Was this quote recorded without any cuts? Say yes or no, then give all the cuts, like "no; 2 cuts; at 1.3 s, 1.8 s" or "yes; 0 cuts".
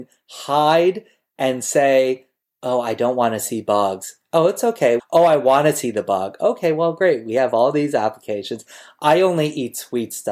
no; 1 cut; at 5.0 s